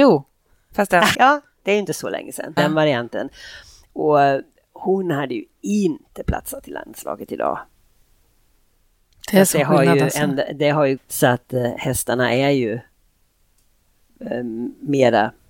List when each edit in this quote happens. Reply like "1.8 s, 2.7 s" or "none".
1.1 s, 2.6 s, 11.0 s